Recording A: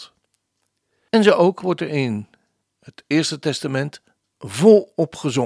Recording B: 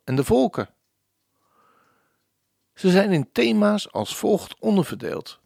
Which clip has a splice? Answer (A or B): A